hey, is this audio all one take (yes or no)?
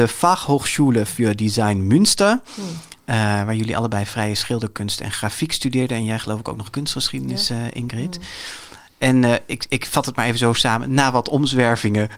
yes